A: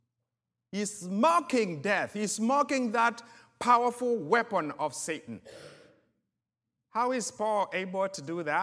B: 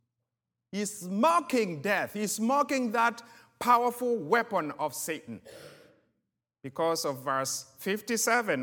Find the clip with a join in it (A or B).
B